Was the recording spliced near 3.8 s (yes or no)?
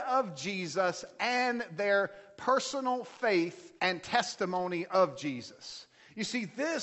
yes